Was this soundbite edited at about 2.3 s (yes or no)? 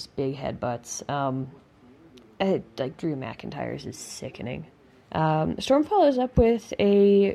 no